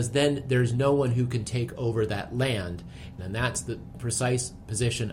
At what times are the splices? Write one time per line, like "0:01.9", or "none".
0:03.2